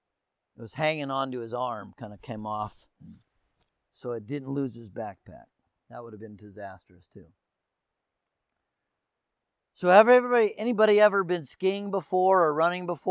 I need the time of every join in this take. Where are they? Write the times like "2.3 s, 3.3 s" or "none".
none